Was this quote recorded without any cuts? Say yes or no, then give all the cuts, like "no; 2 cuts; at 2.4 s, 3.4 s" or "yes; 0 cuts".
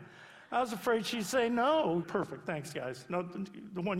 no; 1 cut; at 2.0 s